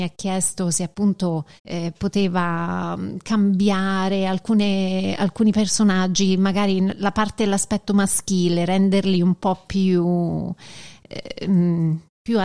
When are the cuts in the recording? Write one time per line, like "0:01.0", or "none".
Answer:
0:01.6